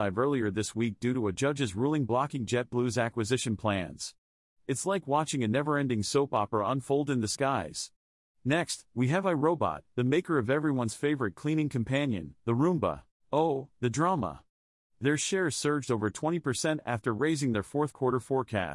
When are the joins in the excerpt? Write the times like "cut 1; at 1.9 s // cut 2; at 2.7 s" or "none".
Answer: cut 1; at 13.2 s // cut 2; at 14.8 s